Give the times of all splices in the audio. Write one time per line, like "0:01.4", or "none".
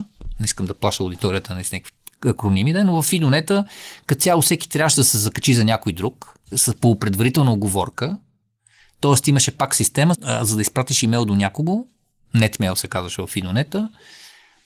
0:06.5
0:10.1